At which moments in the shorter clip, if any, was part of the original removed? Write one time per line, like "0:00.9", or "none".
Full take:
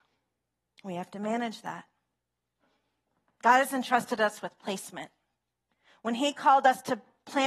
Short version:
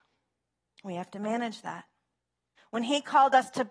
0:02.6